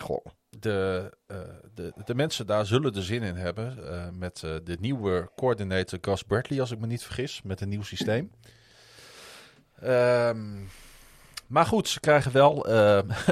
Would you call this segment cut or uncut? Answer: uncut